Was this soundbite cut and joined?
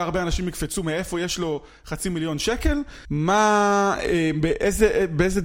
yes; 1 cut; at 3.0 s

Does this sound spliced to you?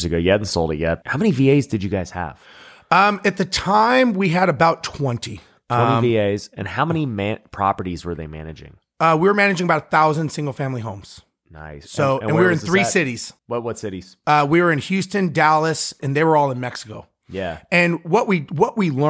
yes; 3 cuts; at 1.0 s, 13.4 s, 16.0 s

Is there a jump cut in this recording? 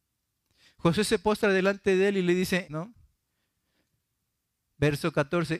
yes; 1 cut; at 2.7 s

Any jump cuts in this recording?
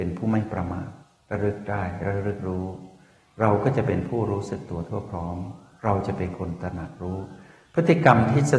no; 0 cuts

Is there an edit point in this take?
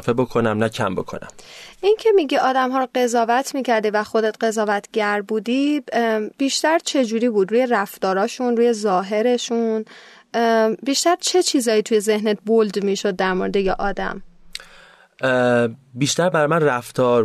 no; 0 cuts

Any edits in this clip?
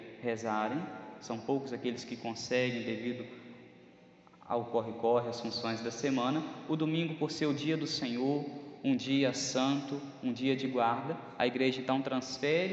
no; 0 cuts

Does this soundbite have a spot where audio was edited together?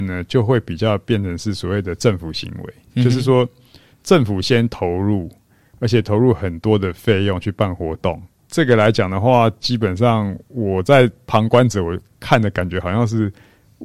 no; 0 cuts

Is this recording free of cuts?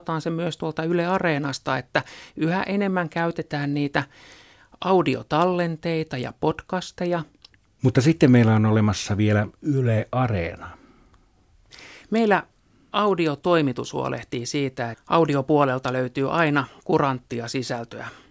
no; 1 cut; at 14.9 s

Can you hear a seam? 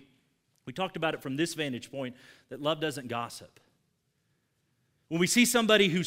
no; 0 cuts

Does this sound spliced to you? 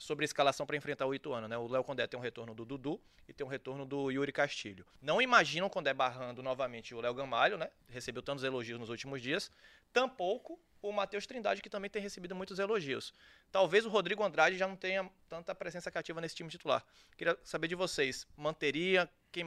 yes; 1 cut; at 7.8 s

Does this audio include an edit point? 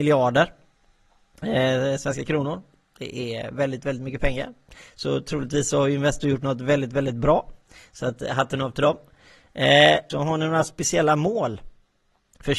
yes; 1 cut; at 10.1 s

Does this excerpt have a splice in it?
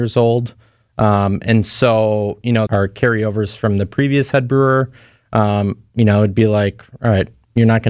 yes; 1 cut; at 2.7 s

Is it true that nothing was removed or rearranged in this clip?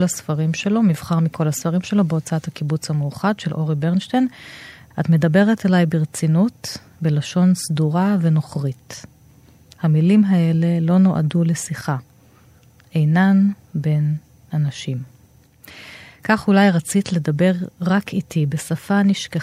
no; 1 cut; at 4.9 s

